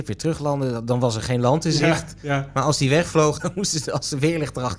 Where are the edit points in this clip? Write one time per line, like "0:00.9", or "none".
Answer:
0:03.4

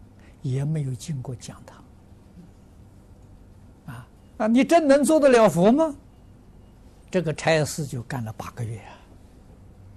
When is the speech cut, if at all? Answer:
0:04.2
0:07.0

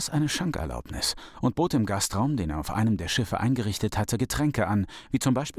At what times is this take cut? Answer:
none

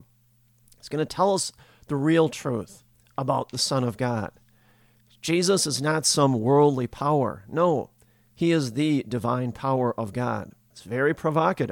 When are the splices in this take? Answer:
0:10.7

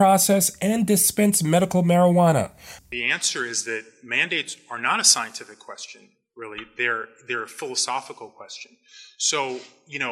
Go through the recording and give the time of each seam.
0:02.8

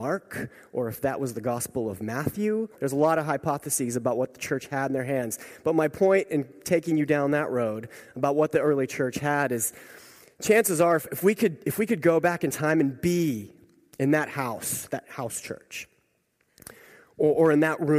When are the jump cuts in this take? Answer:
0:02.7

